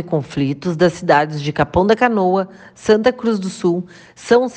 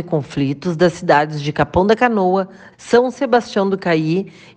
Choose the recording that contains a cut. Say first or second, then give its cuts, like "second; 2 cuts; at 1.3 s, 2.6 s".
second; 1 cut; at 2.7 s